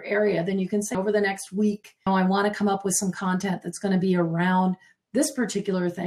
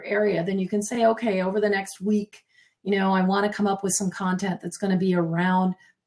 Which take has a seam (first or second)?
first